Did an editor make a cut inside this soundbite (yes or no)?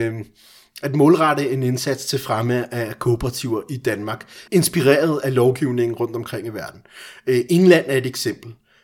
yes